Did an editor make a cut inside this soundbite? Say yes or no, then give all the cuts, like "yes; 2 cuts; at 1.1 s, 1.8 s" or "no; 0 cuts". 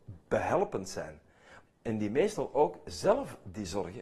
yes; 1 cut; at 1.7 s